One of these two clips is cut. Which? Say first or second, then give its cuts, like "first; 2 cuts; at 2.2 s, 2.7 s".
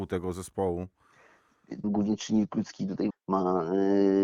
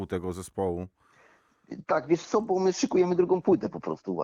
first; 2 cuts; at 1.8 s, 3.1 s